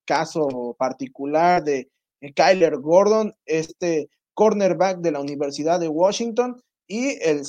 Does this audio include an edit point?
no; 0 cuts

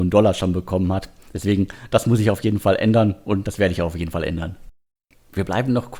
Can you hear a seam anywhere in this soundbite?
no; 0 cuts

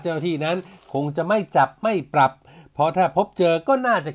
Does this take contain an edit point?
no; 0 cuts

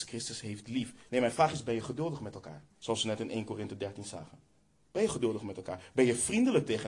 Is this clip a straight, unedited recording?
no; 2 cuts; at 1.1 s, 2.7 s

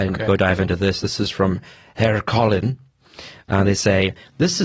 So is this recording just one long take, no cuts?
yes; 0 cuts

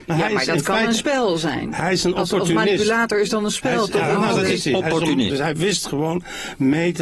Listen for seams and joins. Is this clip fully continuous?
no; 1 cut; at 5.3 s

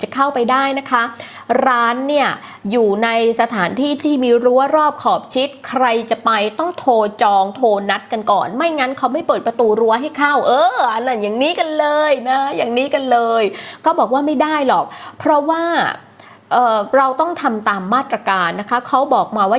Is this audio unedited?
yes; 0 cuts

